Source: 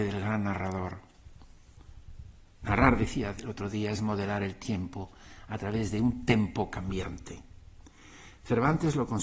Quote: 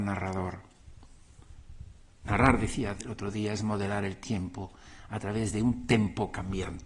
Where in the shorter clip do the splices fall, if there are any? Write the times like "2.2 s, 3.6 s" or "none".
none